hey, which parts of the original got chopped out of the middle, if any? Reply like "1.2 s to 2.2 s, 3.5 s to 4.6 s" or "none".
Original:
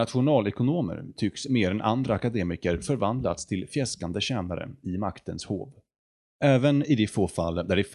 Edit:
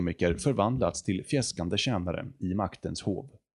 none